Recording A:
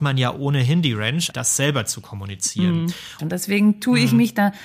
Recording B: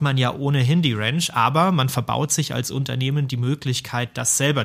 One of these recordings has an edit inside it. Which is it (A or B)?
A